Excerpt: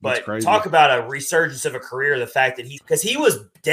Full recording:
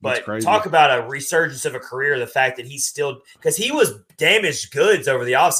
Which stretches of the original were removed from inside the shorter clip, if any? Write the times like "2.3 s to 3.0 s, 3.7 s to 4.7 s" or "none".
2.8 s to 3.3 s